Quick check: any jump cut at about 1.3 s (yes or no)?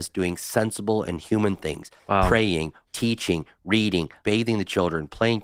no